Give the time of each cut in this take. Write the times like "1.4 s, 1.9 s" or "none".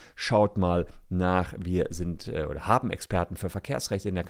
none